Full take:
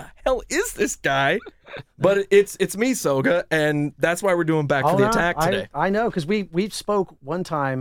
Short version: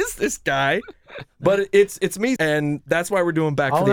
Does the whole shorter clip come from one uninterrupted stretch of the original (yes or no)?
no